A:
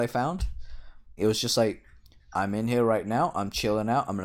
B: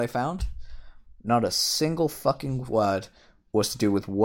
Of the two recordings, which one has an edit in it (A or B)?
A